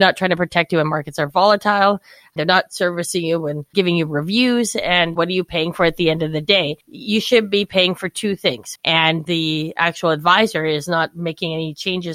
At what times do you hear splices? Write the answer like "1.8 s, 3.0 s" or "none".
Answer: 6.8 s, 8.8 s